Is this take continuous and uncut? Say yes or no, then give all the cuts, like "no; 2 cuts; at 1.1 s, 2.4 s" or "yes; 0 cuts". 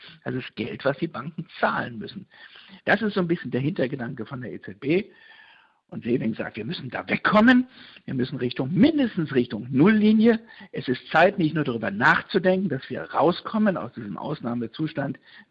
no; 1 cut; at 2.8 s